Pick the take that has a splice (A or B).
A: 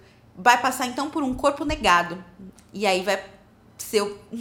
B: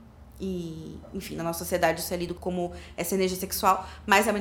B